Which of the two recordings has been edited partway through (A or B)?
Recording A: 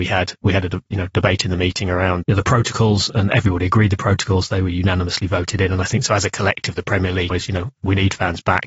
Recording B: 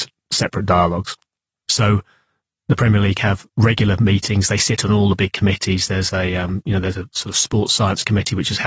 A